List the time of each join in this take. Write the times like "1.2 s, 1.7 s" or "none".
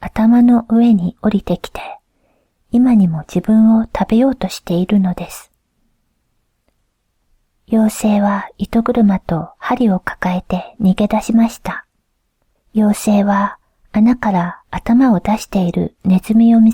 12.6 s